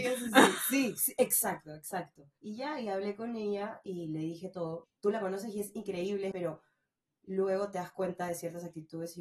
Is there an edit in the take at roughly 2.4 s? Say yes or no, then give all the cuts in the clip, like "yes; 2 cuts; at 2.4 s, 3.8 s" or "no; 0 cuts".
yes; 3 cuts; at 2.4 s, 4.8 s, 6.3 s